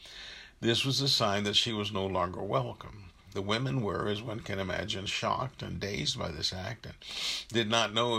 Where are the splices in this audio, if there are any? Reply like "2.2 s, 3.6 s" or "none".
none